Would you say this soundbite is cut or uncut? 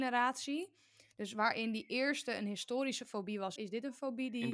cut